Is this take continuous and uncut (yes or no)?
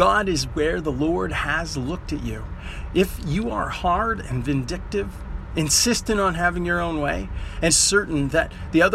no